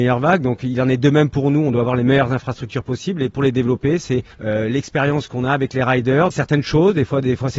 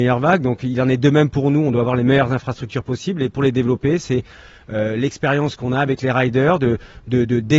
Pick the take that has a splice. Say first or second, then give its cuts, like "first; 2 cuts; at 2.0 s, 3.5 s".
first; 2 cuts; at 4.3 s, 6.3 s